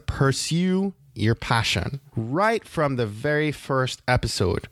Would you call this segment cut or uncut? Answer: uncut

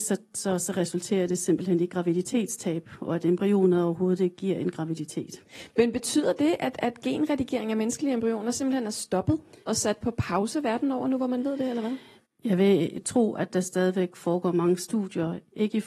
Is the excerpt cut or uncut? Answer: uncut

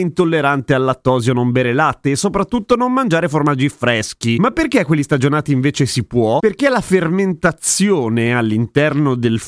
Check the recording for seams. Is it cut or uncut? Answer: uncut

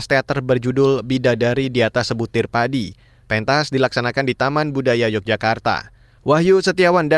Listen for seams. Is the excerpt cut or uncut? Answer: cut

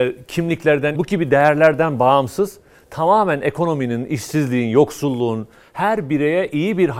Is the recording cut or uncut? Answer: cut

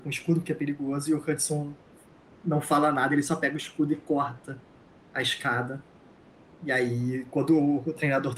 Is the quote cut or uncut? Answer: uncut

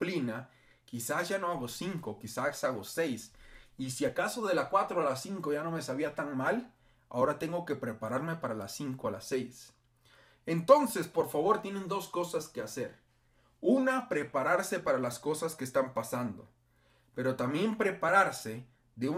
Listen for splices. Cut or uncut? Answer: uncut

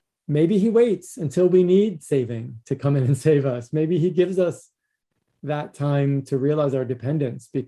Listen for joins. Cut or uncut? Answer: uncut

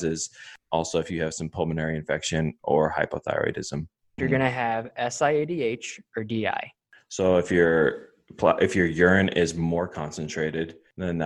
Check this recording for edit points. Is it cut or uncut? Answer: cut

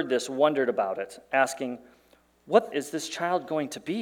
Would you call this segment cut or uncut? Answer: cut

